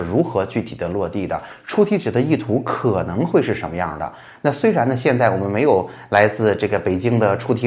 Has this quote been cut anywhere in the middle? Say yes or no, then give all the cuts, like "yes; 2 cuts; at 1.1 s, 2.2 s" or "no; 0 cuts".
no; 0 cuts